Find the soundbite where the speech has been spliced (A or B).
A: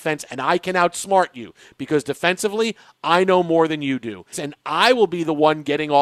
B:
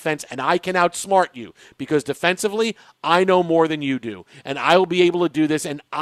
A